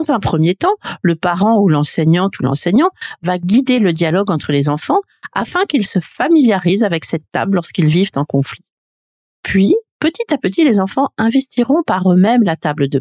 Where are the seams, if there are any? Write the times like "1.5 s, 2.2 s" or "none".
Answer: none